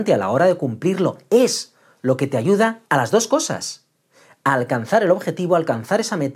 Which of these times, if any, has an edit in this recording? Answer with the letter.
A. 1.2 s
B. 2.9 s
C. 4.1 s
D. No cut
B